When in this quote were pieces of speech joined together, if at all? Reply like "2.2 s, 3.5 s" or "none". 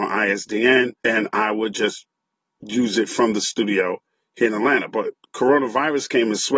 1.0 s